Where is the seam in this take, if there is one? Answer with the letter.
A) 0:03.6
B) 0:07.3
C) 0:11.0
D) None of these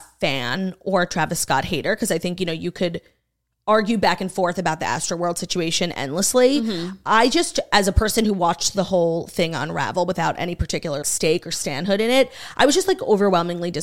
C